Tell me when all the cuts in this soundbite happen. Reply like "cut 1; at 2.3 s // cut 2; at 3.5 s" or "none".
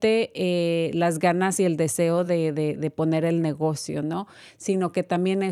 none